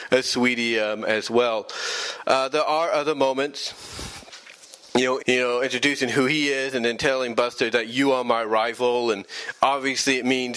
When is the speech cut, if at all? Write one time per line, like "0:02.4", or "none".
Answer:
0:05.2